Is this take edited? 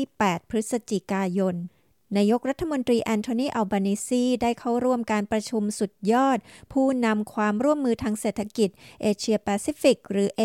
no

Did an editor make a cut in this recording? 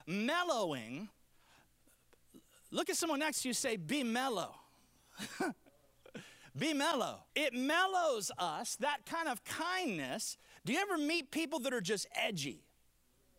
yes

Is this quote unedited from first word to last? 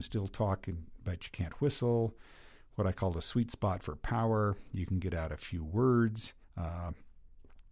no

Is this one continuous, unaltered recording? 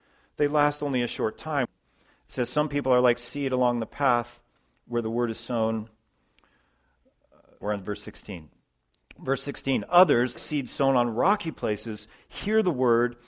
no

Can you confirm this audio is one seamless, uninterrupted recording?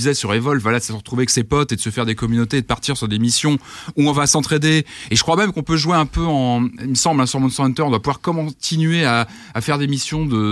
yes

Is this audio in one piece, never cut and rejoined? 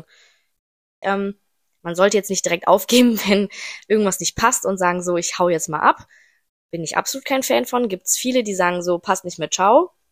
no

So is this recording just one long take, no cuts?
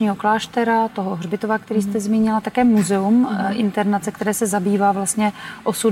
yes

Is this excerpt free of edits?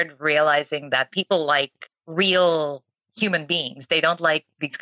yes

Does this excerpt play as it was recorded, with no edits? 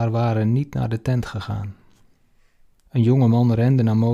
no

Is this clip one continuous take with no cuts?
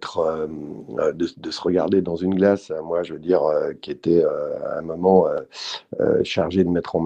yes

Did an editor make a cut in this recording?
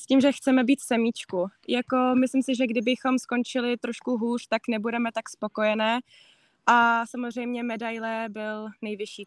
no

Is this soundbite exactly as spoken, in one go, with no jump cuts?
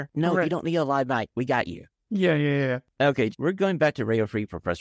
no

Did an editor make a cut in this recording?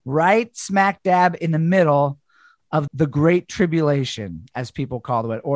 yes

